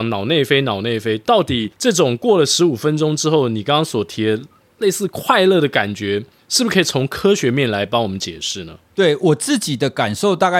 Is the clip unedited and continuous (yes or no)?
yes